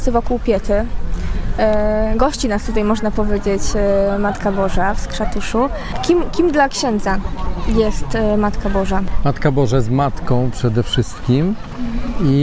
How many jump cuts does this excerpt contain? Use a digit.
0